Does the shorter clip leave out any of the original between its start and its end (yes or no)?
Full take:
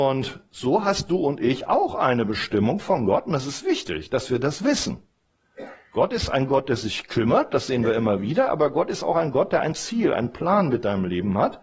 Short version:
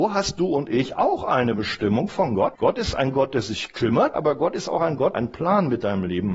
yes